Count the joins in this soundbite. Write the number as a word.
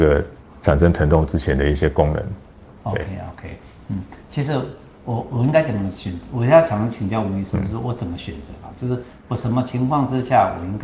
zero